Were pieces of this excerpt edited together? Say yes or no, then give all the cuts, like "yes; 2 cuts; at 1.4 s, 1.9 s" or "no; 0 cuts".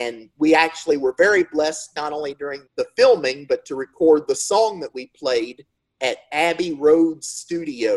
yes; 1 cut; at 2.7 s